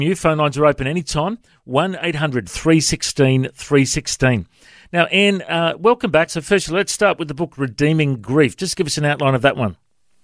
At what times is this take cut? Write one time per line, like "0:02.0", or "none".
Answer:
0:06.3